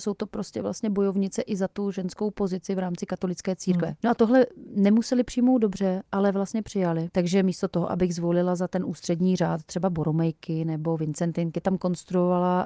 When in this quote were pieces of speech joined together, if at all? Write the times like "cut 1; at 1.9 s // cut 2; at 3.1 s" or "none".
cut 1; at 4.0 s // cut 2; at 7.1 s // cut 3; at 11.6 s